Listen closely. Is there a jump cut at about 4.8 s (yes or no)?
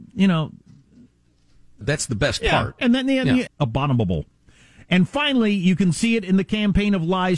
no